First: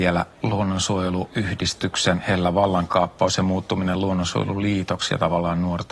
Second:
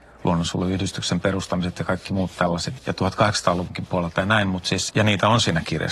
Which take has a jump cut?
second; 2 cuts; at 2.8 s, 4.9 s

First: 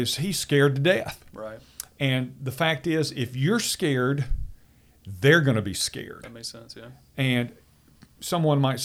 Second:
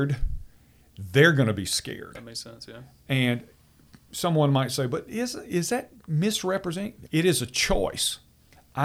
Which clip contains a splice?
second; 1 cut; at 7.1 s

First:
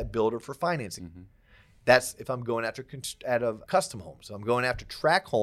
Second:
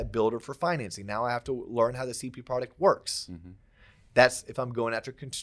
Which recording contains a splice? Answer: first; 2 cuts; at 1.0 s, 3.6 s

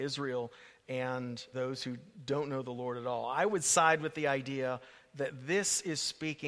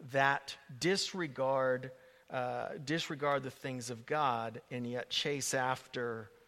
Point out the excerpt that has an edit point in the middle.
first; 1 cut; at 1.5 s

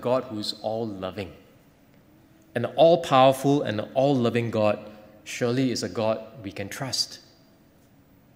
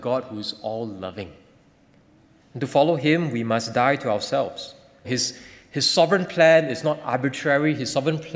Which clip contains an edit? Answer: second; 2 cuts; at 2.4 s, 5.0 s

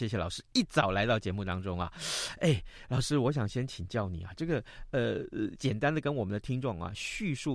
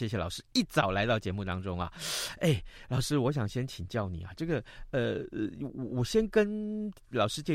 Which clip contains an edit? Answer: first; 1 cut; at 5.5 s

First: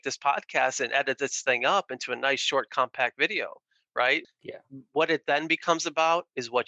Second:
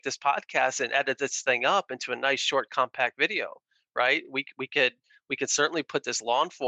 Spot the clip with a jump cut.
first; 1 cut; at 4.2 s

